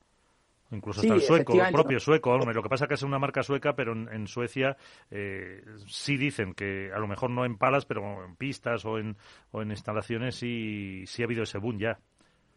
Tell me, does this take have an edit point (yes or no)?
no